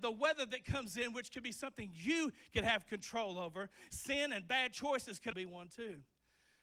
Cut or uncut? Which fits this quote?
cut